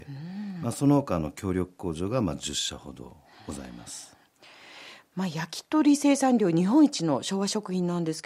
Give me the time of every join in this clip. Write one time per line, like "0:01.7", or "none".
none